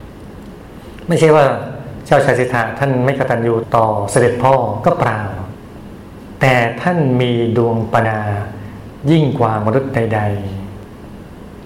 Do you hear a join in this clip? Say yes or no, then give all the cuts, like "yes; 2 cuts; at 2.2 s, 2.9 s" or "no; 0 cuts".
yes; 1 cut; at 8.0 s